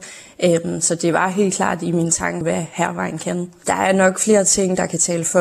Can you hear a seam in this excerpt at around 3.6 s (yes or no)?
yes